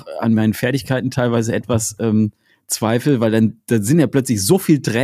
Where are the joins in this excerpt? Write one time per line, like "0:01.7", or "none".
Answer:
none